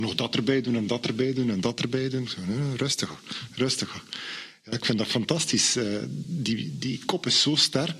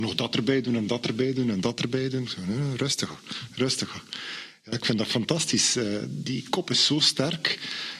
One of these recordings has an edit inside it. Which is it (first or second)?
second